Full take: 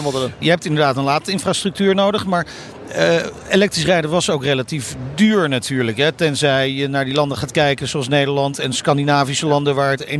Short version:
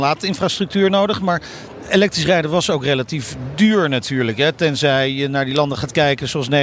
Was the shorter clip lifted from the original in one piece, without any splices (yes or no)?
no